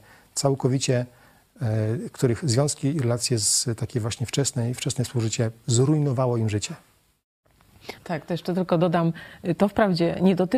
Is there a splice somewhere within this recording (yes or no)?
yes